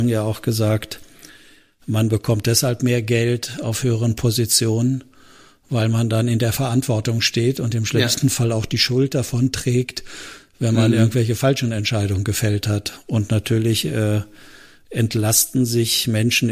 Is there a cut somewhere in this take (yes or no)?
no